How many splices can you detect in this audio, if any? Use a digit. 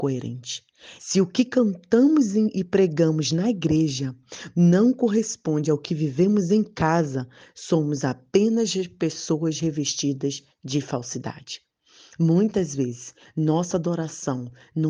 1